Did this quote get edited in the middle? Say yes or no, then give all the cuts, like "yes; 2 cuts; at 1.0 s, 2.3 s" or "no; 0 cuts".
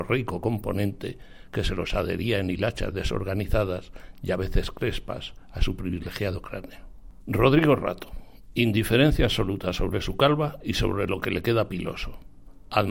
yes; 1 cut; at 7.2 s